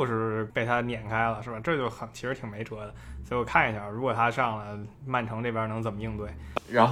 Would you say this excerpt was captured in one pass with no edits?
yes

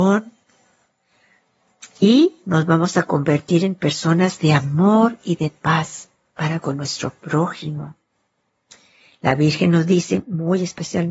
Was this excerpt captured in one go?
yes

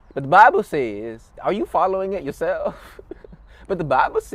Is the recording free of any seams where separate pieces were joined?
no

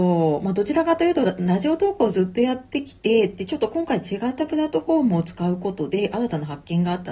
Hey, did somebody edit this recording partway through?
no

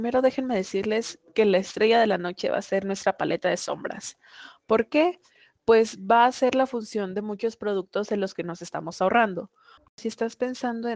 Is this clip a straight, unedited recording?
no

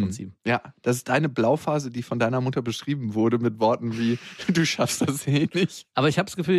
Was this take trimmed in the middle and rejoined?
no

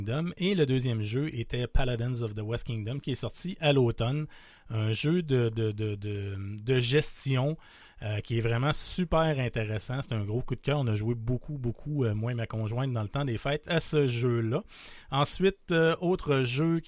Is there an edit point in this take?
no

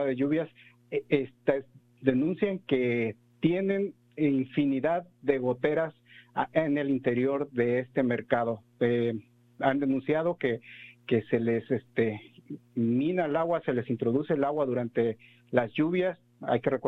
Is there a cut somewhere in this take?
no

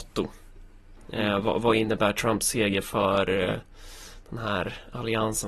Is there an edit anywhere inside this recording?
no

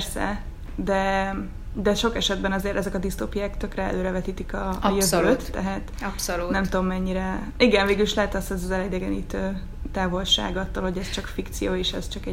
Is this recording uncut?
yes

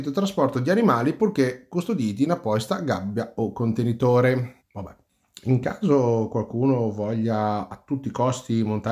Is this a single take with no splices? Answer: no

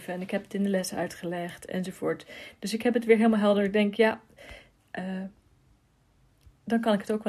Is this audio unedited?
yes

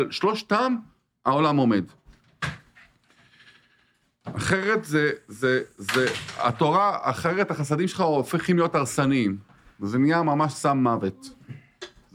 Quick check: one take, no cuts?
yes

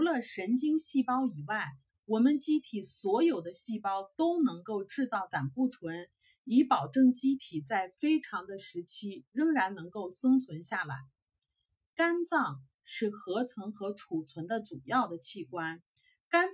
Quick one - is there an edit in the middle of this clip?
no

